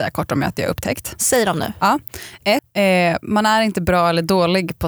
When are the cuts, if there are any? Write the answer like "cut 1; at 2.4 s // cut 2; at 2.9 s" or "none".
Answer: cut 1; at 2.6 s